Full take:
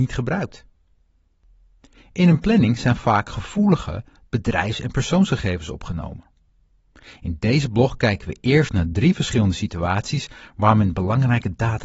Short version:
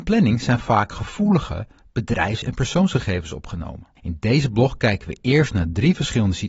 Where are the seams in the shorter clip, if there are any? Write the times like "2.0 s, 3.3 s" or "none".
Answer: 4.0 s